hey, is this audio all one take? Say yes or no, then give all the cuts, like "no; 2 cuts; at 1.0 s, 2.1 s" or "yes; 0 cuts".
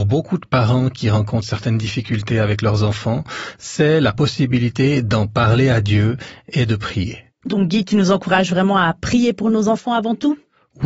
yes; 0 cuts